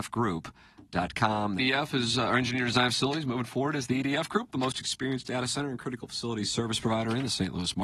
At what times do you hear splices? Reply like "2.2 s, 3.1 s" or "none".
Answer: 1.6 s